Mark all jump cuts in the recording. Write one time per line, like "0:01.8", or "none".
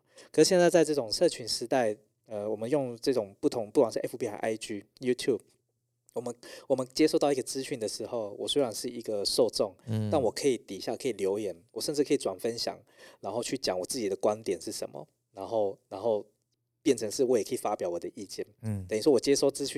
none